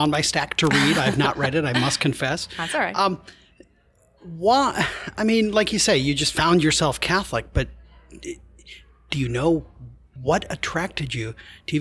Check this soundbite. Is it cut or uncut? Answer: cut